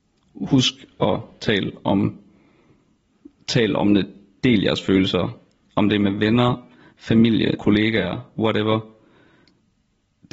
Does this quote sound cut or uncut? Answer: cut